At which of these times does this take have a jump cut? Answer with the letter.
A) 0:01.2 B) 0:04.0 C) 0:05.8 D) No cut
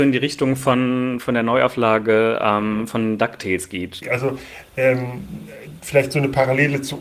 B